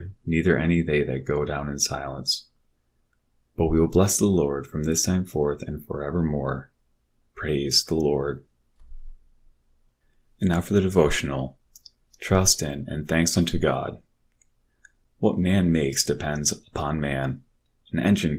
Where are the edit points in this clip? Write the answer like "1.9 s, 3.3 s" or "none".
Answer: none